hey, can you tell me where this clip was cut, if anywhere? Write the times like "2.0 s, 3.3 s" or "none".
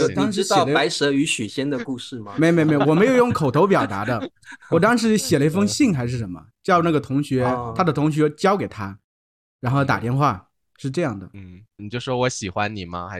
11.8 s